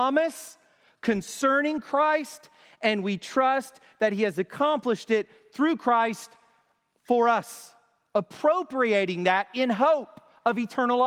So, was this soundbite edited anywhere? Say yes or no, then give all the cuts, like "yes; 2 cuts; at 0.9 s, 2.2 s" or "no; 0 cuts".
no; 0 cuts